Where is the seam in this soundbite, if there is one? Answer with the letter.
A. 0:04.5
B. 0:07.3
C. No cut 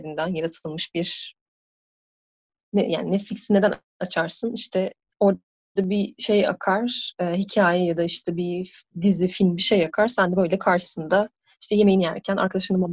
C